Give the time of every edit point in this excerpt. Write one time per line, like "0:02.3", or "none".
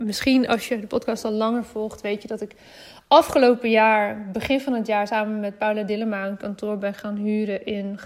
none